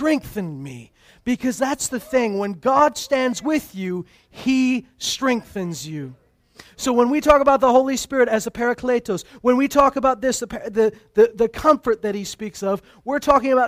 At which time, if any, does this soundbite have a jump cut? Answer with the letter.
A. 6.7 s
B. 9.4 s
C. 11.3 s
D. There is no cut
D